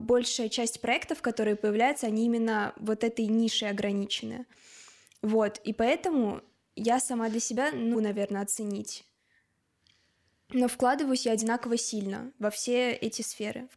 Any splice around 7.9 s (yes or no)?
yes